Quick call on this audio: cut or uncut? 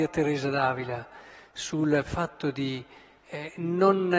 uncut